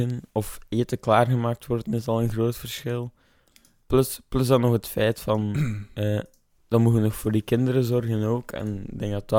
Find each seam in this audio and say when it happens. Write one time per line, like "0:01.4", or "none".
0:06.6